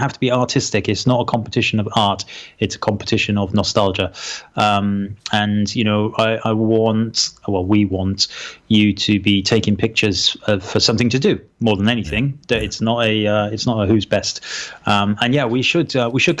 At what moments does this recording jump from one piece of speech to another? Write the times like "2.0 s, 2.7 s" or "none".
none